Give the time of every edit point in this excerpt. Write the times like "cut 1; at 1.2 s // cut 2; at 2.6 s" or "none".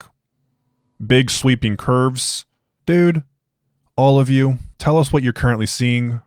cut 1; at 2.8 s // cut 2; at 4.7 s